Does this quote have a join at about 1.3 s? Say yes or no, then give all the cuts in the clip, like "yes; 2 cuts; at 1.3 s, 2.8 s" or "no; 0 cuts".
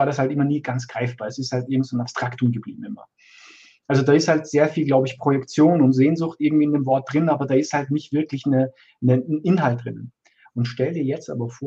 no; 0 cuts